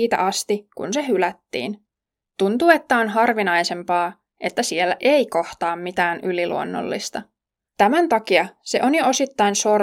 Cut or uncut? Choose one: cut